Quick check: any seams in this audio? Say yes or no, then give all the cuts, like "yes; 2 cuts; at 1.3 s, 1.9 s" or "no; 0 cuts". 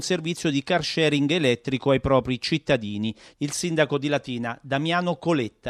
no; 0 cuts